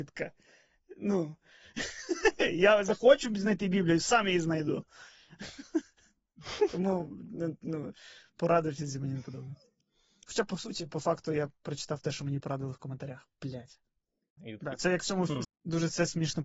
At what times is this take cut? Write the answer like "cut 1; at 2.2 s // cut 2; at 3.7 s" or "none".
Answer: cut 1; at 14.4 s // cut 2; at 15.4 s